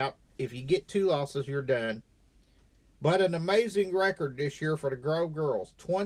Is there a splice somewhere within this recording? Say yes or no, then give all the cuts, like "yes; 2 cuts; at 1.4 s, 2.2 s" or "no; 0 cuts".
no; 0 cuts